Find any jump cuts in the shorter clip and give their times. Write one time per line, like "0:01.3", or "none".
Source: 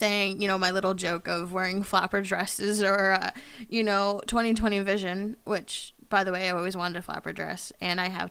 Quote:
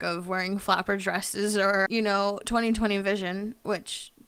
0:01.9